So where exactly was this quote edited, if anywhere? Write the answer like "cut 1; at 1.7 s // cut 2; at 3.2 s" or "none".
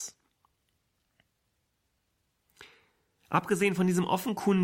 none